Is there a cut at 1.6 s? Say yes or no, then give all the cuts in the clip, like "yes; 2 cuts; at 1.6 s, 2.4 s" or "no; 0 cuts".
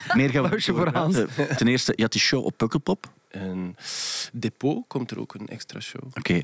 yes; 2 cuts; at 1.6 s, 3.1 s